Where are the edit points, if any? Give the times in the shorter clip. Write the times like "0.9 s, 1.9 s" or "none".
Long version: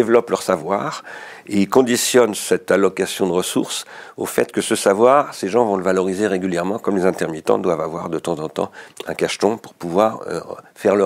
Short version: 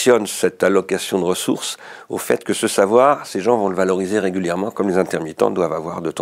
none